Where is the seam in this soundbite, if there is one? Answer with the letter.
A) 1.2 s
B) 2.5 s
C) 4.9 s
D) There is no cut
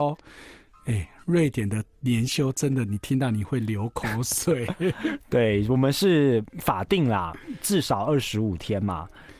B